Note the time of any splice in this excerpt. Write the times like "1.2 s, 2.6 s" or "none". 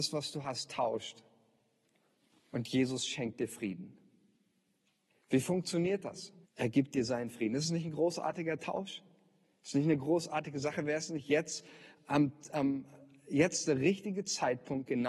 6.4 s

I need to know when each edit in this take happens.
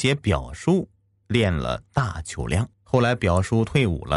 2.7 s

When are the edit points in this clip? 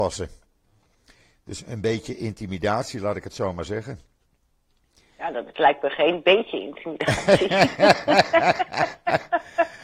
none

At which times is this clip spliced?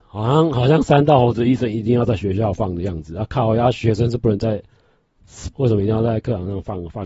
5.5 s

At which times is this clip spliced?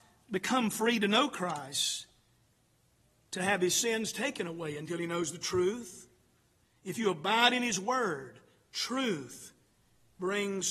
6.7 s

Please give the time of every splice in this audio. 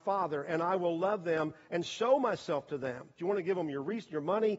3.2 s

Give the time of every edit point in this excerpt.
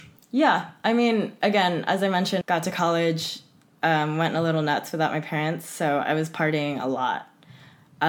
2.4 s

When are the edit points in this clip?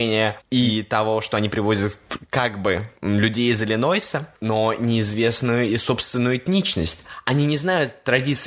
4.4 s

